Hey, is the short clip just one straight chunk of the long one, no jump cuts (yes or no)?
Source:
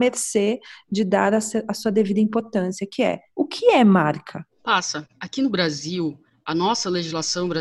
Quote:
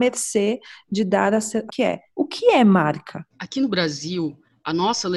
no